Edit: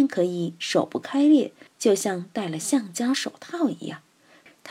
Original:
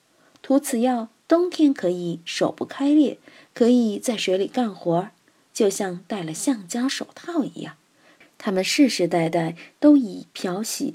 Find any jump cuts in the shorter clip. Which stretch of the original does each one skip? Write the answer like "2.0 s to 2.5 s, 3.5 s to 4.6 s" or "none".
3.3 s to 5.4 s